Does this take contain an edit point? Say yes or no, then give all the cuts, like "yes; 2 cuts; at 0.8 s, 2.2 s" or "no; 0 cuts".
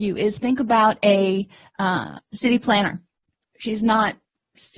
yes; 1 cut; at 3.4 s